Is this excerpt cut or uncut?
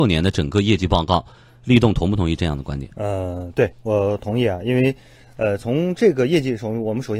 uncut